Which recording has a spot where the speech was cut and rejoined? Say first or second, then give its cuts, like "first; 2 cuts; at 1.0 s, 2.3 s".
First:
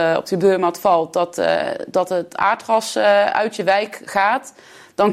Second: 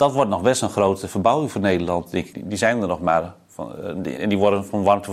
second; 2 cuts; at 2.3 s, 4.2 s